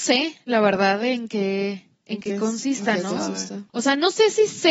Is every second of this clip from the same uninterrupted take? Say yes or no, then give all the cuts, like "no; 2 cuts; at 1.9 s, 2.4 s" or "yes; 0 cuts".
no; 1 cut; at 3.7 s